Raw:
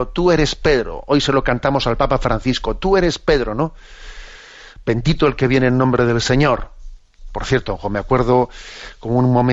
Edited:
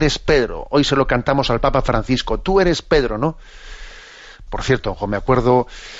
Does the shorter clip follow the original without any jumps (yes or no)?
no